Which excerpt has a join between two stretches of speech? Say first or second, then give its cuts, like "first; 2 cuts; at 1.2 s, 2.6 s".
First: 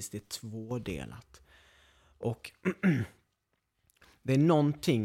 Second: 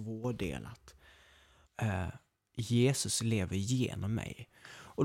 second; 1 cut; at 1.6 s